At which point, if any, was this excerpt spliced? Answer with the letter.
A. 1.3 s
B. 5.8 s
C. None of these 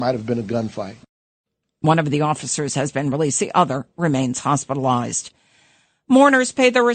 C